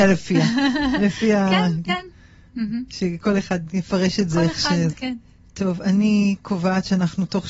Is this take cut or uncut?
cut